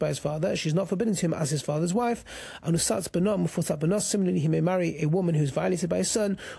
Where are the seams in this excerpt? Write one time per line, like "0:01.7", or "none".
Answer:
none